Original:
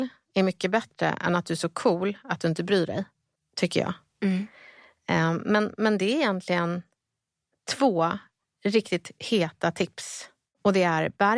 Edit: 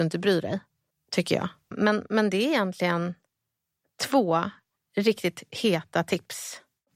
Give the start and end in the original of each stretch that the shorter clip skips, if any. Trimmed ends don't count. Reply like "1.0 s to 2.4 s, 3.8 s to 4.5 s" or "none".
4.2 s to 5.4 s

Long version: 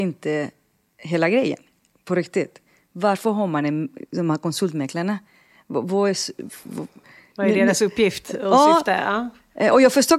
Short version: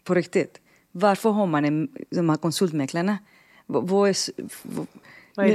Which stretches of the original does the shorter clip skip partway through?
none

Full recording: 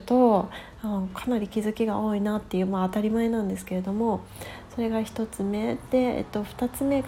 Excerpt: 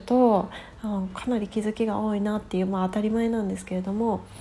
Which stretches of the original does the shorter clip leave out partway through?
none

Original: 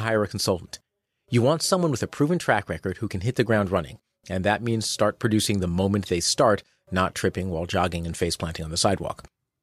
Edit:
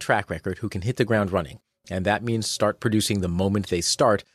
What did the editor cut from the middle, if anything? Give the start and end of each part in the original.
none

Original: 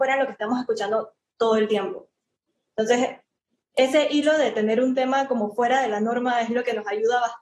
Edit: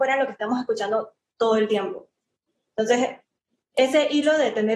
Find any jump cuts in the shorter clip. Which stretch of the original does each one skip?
none

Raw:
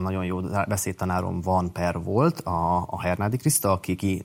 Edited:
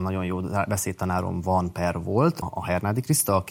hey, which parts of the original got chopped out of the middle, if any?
2.4 s to 2.8 s

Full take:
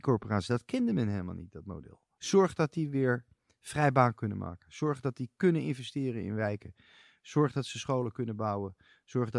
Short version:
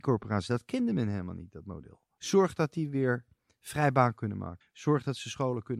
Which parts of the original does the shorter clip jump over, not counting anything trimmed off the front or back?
4.6 s to 7.1 s

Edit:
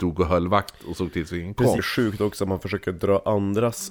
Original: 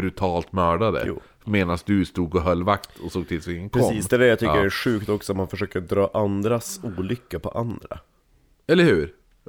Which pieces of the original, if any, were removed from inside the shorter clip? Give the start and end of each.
3.9 s to 4.7 s

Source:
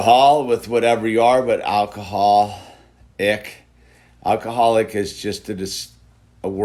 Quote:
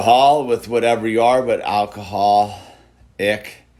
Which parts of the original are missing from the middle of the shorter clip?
none

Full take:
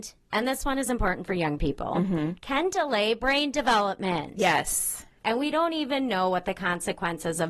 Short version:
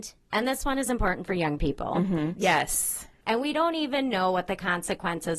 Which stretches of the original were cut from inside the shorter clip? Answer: 2.4 s to 4.3 s

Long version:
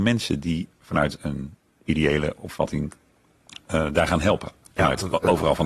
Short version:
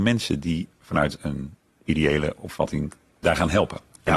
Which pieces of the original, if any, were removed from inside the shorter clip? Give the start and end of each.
3.2 s to 3.9 s

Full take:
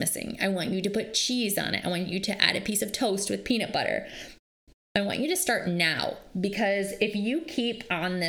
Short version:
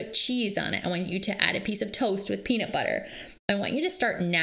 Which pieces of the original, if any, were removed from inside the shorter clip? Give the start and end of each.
4.4 s to 4.9 s

